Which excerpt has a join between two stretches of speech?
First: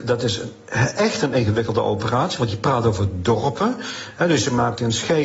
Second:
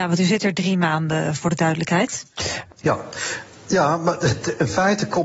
second; 1 cut; at 2.7 s

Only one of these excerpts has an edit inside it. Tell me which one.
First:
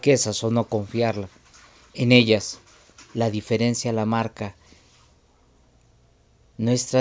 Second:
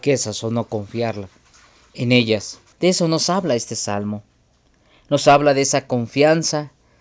second; 1 cut; at 2.7 s

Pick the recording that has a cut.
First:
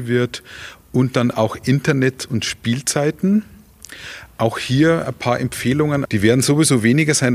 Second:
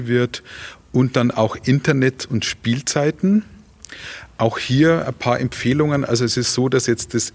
first; 1 cut; at 6.1 s

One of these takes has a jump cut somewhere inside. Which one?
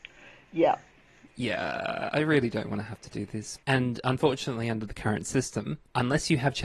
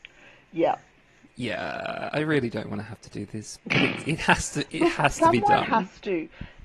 first; 1 cut; at 3.6 s

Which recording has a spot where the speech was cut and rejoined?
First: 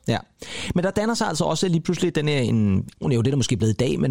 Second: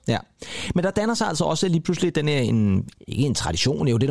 first; 1 cut; at 3.0 s

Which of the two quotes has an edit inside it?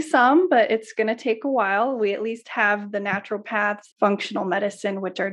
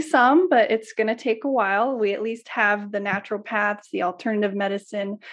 first; 1 cut; at 3.9 s

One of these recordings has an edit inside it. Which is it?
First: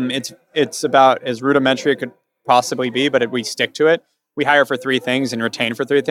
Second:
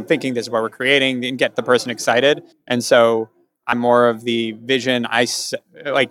second; 2 cuts; at 2.5 s, 3.7 s

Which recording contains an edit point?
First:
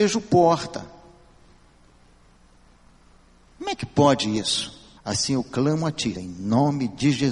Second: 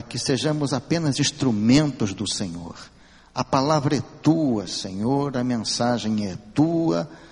first; 2 cuts; at 5.0 s, 6.1 s

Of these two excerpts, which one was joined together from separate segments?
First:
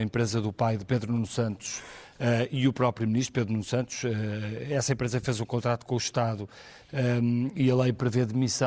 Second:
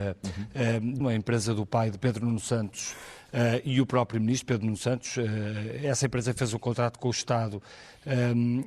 second; 1 cut; at 1.0 s

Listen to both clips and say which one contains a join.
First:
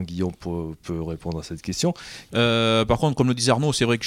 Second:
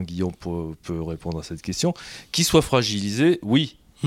first; 1 cut; at 2.3 s

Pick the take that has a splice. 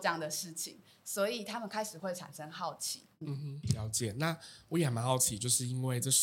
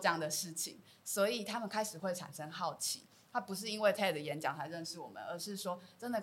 first; 1 cut; at 3.1 s

